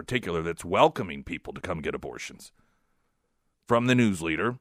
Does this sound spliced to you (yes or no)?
yes